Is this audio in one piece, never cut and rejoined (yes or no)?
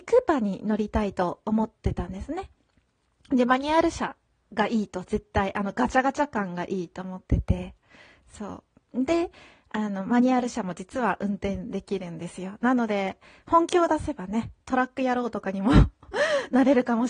yes